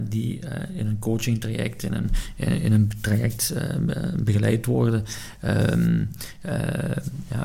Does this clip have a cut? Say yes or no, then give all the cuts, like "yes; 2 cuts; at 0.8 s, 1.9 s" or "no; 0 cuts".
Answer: no; 0 cuts